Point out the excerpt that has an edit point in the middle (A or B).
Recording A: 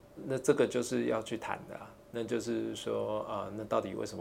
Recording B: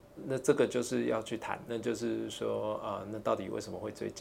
B